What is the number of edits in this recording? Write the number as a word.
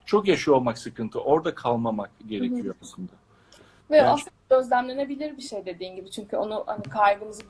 zero